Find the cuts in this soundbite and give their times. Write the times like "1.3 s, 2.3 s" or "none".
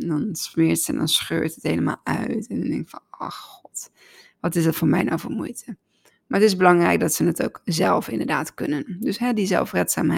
none

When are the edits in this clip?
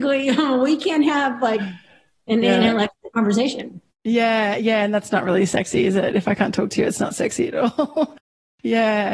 none

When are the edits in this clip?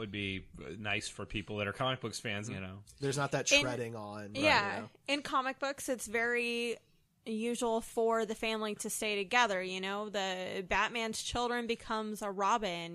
2.4 s

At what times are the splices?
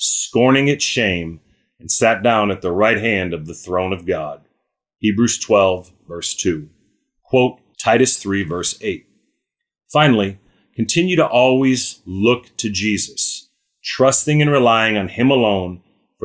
7.7 s

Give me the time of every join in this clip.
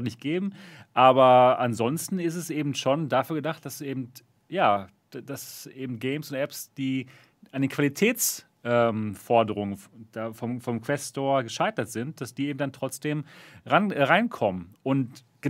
none

